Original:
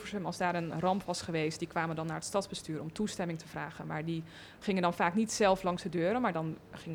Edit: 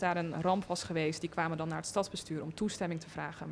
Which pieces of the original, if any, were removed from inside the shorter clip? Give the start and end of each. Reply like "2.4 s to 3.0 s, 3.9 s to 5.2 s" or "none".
none